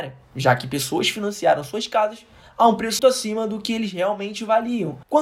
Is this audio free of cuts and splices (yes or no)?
no